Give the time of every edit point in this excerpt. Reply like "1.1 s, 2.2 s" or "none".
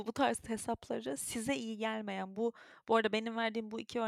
none